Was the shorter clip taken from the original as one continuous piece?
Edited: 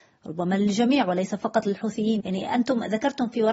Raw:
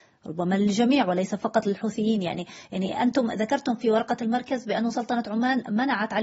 no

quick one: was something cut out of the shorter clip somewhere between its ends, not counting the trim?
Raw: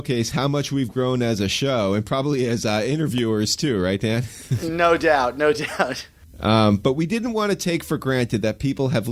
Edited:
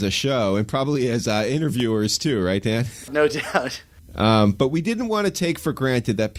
yes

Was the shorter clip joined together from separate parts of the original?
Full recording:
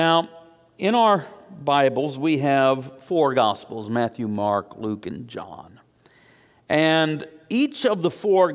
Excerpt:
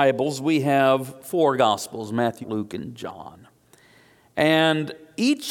yes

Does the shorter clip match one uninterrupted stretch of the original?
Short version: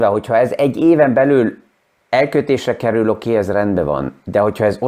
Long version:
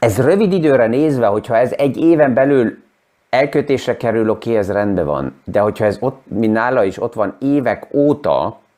yes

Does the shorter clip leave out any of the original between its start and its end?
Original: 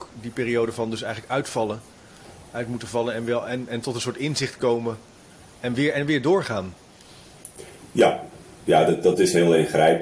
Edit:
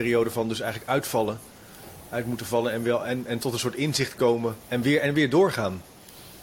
yes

